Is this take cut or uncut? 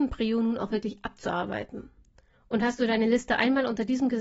cut